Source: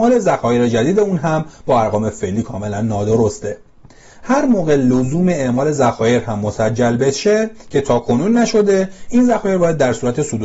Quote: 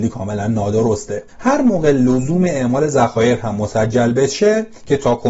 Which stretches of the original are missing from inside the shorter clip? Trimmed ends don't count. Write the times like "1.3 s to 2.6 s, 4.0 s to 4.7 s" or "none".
3.6 s to 4.1 s